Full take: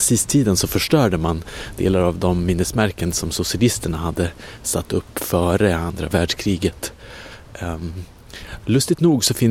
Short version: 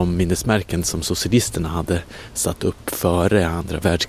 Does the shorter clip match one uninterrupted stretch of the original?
yes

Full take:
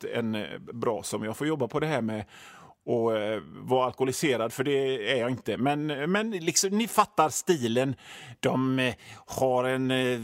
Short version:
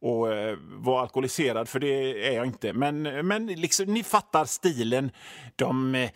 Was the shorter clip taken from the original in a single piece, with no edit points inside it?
yes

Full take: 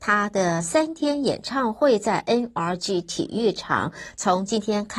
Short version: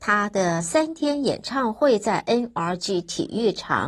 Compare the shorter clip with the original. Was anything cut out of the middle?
no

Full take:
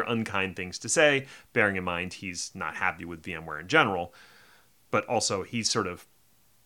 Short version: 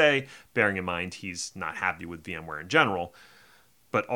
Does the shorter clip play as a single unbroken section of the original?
yes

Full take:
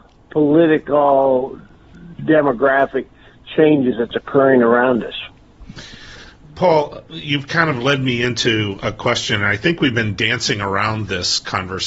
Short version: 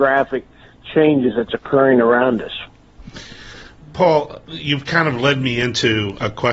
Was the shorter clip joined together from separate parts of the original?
no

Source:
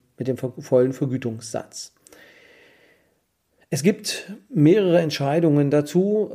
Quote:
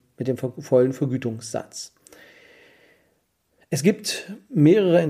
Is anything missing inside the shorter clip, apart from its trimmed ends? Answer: no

